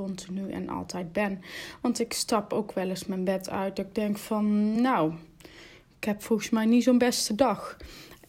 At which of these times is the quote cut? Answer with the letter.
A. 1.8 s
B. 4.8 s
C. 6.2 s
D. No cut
D